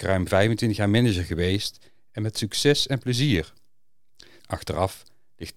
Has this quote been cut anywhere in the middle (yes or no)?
yes